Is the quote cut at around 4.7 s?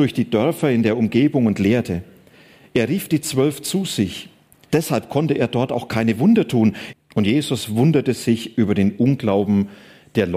yes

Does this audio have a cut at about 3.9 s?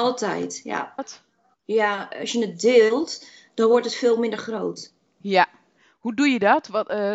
no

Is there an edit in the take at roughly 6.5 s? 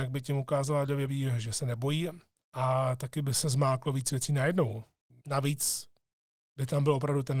no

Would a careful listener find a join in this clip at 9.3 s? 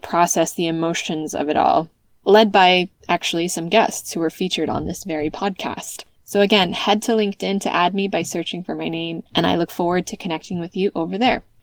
yes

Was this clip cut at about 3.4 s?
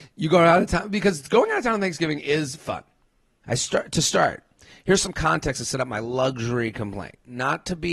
yes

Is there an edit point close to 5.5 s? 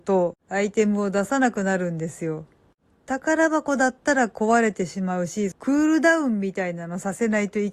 yes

